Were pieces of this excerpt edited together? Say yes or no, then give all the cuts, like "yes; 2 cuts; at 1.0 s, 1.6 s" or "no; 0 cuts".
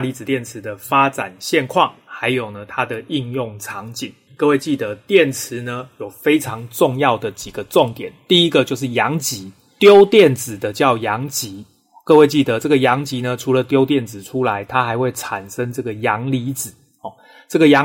yes; 1 cut; at 4.3 s